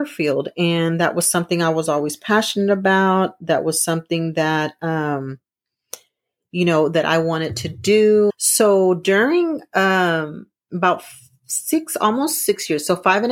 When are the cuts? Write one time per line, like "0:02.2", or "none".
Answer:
0:08.3